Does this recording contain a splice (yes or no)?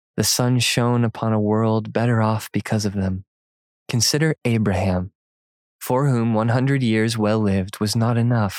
no